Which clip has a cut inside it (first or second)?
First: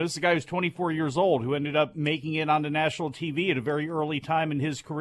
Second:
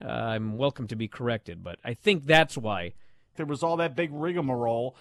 second